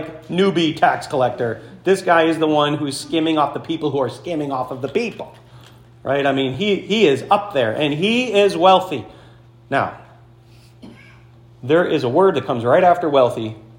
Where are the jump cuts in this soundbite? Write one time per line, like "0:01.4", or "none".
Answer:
none